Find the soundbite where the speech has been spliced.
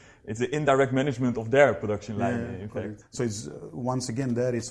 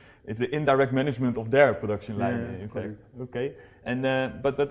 first; 1 cut; at 3.0 s

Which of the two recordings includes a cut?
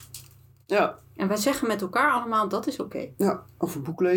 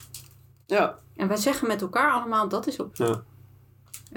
second; 1 cut; at 2.9 s

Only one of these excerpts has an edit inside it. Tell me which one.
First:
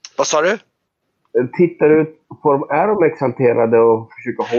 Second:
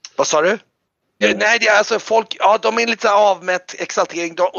second; 1 cut; at 1.2 s

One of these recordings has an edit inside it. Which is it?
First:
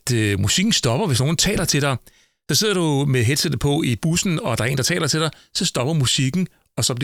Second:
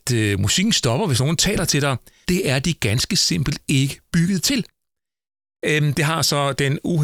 second; 2 cuts; at 2.2 s, 5.6 s

